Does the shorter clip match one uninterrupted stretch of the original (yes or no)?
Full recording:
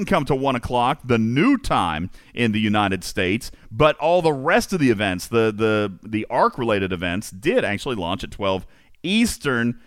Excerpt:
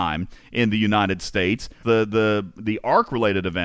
no